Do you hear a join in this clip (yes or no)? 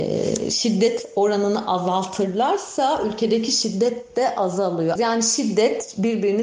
yes